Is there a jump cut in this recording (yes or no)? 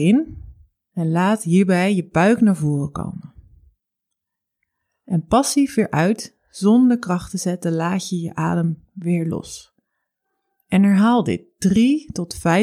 no